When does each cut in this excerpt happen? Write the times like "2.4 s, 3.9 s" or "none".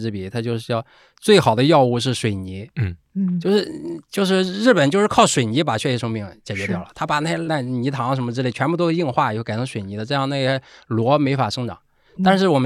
none

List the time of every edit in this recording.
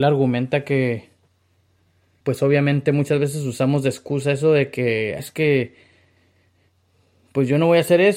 2.2 s, 5.2 s

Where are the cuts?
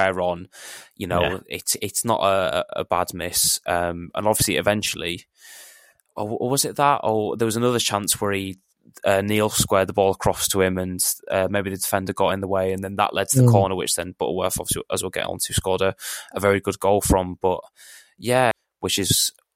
18.5 s

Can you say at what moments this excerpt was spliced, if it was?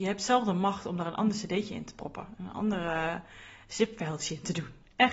none

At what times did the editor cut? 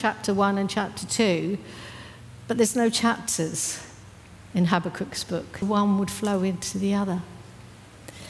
5.6 s

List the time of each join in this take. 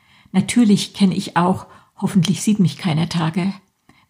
none

